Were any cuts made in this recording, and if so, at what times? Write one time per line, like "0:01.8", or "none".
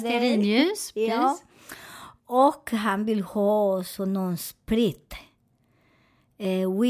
0:02.2